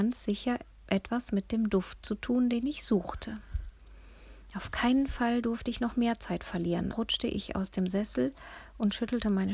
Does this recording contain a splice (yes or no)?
yes